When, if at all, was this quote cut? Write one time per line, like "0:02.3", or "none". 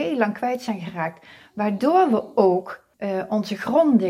0:02.9